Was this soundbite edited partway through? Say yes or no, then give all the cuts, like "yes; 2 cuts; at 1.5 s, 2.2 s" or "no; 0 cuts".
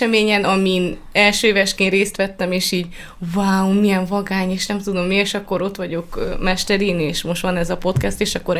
no; 0 cuts